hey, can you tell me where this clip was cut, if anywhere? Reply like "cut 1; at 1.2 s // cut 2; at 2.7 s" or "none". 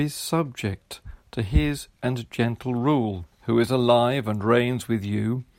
cut 1; at 2.0 s // cut 2; at 3.3 s